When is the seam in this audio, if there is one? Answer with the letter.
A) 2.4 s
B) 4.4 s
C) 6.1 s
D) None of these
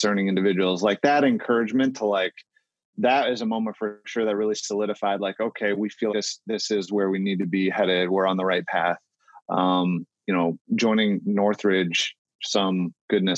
C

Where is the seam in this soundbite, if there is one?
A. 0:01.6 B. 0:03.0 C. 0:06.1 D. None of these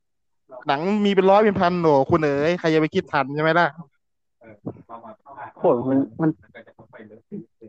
C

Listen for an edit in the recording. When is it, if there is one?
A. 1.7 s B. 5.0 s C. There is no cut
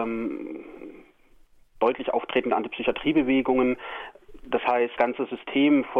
B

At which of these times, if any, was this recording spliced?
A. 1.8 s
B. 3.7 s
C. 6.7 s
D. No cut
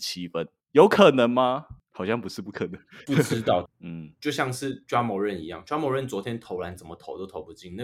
B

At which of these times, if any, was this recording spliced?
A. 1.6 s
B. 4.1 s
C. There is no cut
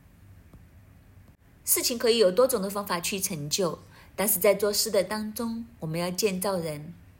A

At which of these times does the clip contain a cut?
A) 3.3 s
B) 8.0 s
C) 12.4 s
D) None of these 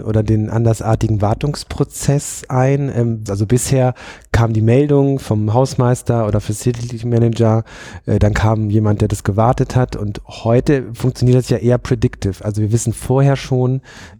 A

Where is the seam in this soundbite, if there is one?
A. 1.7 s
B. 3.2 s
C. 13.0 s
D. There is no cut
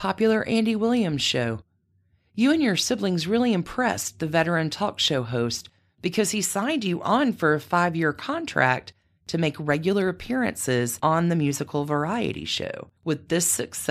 C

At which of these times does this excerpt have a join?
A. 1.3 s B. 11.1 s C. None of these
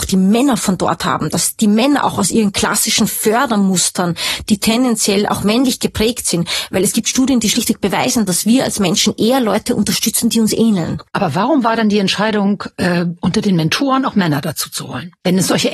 B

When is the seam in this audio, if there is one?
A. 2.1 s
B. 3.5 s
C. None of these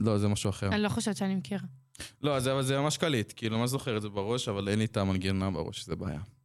C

